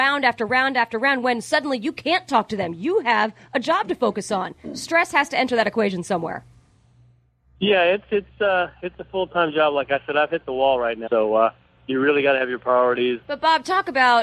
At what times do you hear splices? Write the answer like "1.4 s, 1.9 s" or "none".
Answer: 11.1 s, 13.2 s